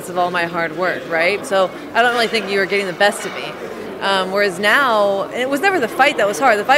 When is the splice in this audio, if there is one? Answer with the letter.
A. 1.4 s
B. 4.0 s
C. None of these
A